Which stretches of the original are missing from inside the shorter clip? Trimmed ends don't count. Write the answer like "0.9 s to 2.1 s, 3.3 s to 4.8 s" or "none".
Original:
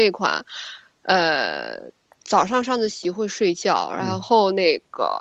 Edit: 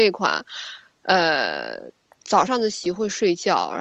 2.5 s to 2.6 s